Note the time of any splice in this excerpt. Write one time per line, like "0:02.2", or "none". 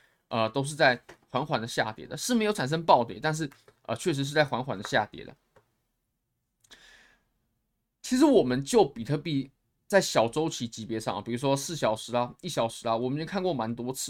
none